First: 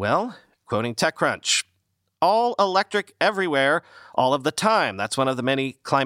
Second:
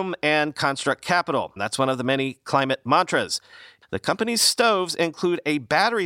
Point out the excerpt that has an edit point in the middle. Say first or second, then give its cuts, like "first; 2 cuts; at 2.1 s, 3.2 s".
second; 2 cuts; at 1.6 s, 3.8 s